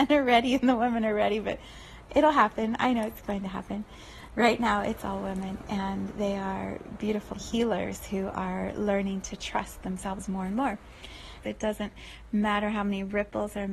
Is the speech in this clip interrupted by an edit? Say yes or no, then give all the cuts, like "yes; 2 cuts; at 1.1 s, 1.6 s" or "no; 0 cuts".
yes; 2 cuts; at 7.3 s, 11.4 s